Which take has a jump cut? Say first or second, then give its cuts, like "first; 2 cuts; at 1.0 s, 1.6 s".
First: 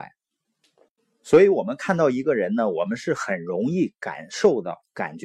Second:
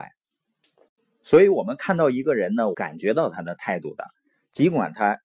second; 1 cut; at 2.7 s